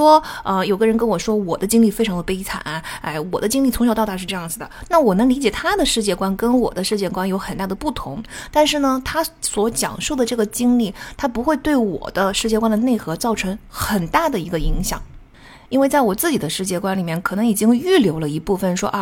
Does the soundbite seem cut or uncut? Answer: uncut